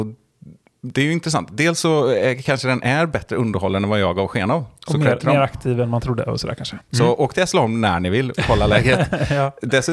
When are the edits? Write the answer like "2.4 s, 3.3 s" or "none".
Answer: 6.8 s